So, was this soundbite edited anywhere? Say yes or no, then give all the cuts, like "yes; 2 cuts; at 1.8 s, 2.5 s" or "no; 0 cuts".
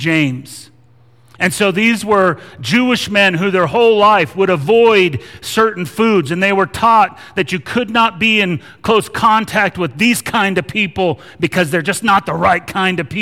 no; 0 cuts